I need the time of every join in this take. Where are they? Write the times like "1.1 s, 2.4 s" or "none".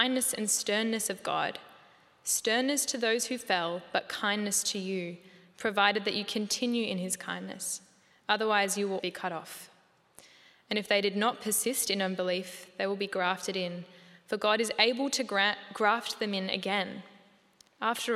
9.0 s